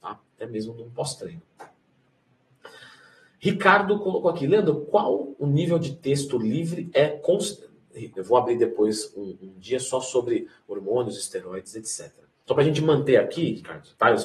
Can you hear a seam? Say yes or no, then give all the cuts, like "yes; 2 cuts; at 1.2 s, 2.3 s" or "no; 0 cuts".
yes; 1 cut; at 8.1 s